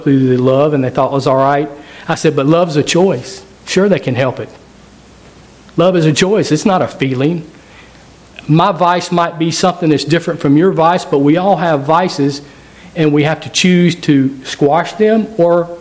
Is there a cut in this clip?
no; 0 cuts

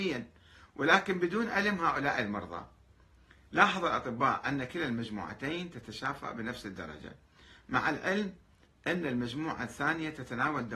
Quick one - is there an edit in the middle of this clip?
no; 0 cuts

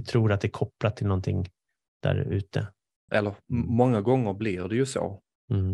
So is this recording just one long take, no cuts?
no; 1 cut; at 3.1 s

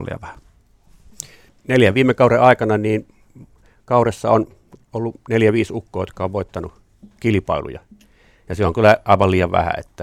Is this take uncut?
no; 1 cut; at 1.5 s

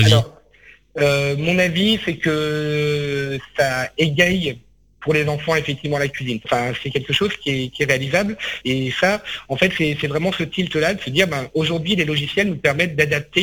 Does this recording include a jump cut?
yes; 2 cuts; at 6.4 s, 8.6 s

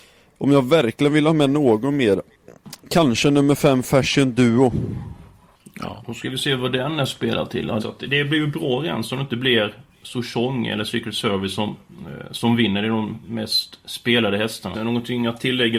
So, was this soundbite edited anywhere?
yes; 2 cuts; at 7.8 s, 14.7 s

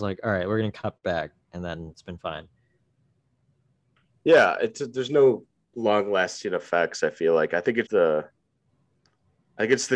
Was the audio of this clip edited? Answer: yes; 2 cuts; at 1.9 s, 7.9 s

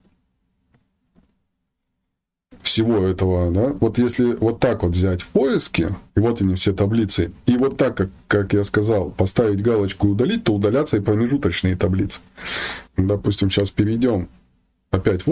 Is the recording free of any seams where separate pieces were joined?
no; 2 cuts; at 6.1 s, 12.9 s

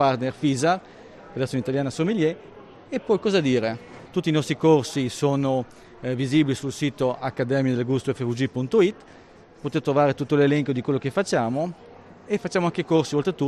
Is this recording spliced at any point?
yes; 1 cut; at 4.1 s

